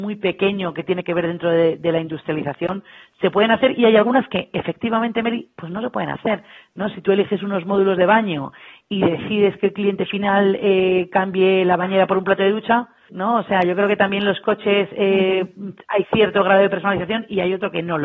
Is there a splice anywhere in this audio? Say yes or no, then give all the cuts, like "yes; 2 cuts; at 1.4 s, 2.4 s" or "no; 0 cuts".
yes; 1 cut; at 13.1 s